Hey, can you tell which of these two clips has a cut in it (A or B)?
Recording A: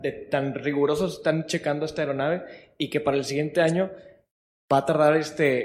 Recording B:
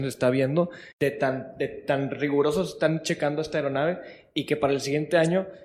B